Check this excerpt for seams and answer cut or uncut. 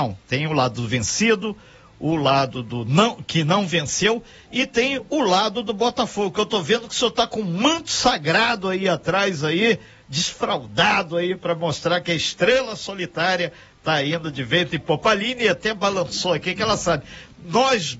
uncut